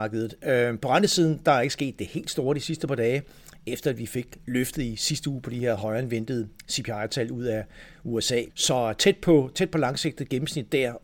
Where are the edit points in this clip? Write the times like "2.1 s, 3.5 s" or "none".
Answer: 8.5 s